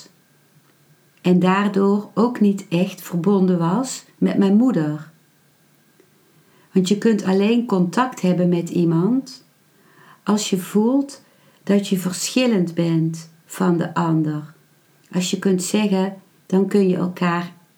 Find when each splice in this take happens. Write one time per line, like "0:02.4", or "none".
0:16.4